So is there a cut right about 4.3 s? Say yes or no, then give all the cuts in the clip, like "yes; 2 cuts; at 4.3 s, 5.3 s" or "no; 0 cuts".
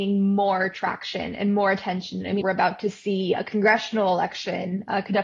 no; 1 cut; at 2.4 s